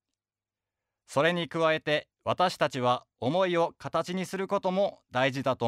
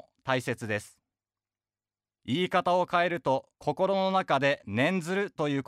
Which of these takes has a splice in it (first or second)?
second